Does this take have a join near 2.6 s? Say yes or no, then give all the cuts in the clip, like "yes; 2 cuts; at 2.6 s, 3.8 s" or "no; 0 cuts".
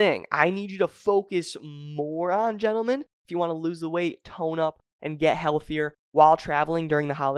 no; 0 cuts